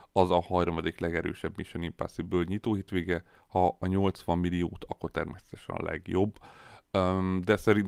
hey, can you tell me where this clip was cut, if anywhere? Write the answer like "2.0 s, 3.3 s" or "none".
none